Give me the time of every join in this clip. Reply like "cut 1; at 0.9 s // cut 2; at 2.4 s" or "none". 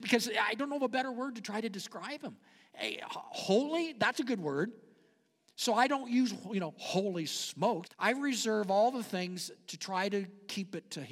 cut 1; at 7.8 s